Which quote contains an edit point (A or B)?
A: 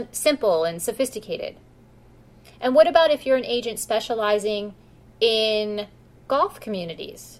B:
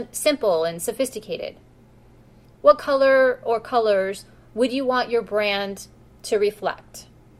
B